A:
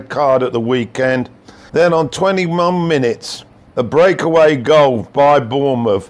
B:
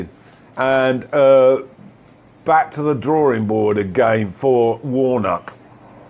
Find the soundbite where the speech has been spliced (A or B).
A